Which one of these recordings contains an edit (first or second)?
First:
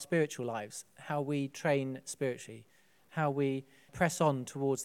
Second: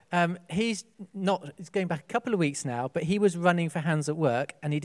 first